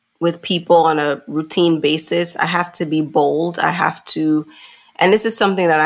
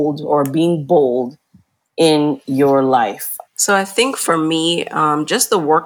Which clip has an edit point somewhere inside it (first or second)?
second